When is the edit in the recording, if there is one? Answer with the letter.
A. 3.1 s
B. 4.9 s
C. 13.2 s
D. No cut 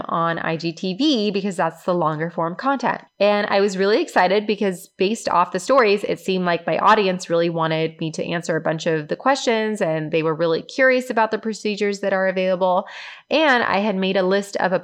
A